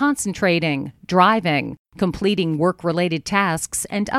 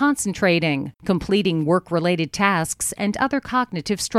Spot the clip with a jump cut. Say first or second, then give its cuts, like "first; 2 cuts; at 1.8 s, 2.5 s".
second; 1 cut; at 0.9 s